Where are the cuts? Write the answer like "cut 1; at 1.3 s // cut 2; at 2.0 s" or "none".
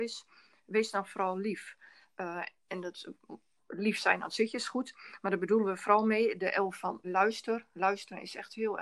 cut 1; at 7.0 s